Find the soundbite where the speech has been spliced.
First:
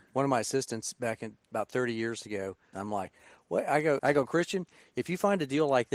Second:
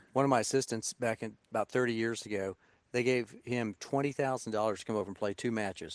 first; 2 cuts; at 2.7 s, 4.0 s

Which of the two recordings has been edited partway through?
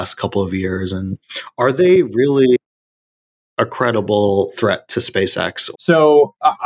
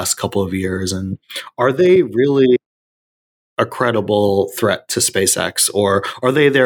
first; 1 cut; at 5.7 s

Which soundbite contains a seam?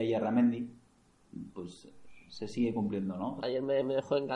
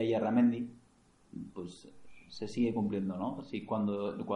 first; 1 cut; at 3.4 s

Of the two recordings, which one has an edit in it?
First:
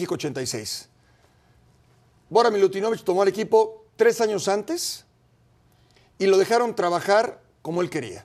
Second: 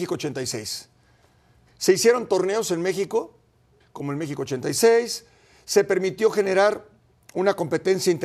second; 2 cuts; at 1.7 s, 3.8 s

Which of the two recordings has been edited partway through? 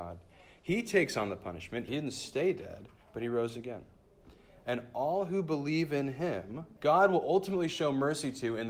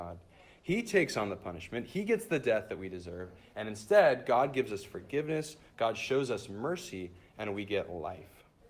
first; 2 cuts; at 1.9 s, 6.8 s

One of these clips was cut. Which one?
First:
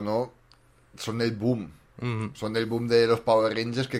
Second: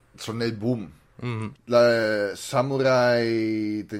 second; 1 cut; at 1.5 s

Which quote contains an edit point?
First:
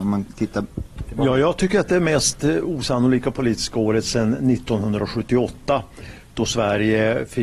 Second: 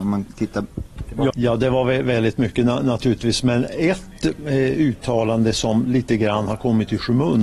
second; 1 cut; at 1.3 s

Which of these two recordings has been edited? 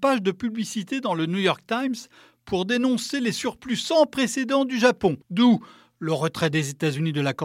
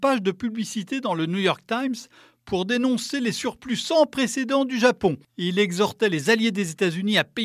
first; 1 cut; at 5.2 s

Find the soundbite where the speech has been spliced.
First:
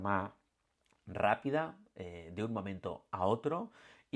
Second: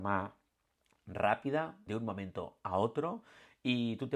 second; 1 cut; at 1.9 s

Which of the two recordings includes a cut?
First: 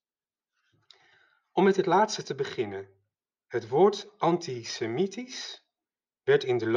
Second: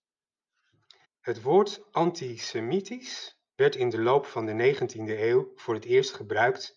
second; 2 cuts; at 1.0 s, 3.5 s

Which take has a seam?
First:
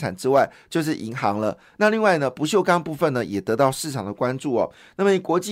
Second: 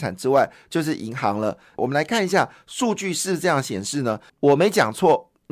second; 2 cuts; at 1.8 s, 4.3 s

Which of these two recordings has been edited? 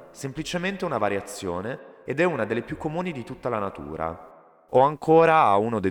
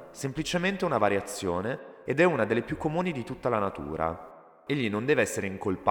second; 1 cut; at 4.7 s

